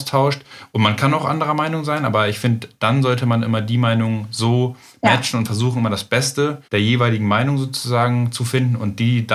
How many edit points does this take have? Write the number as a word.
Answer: one